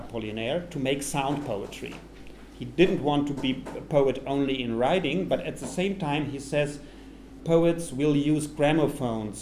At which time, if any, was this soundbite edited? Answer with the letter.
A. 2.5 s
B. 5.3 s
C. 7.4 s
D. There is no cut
C